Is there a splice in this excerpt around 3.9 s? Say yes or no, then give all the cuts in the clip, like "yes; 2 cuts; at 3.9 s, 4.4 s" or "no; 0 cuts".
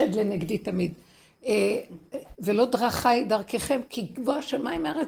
yes; 2 cuts; at 2.3 s, 3.9 s